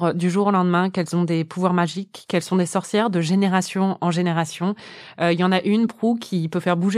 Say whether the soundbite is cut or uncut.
uncut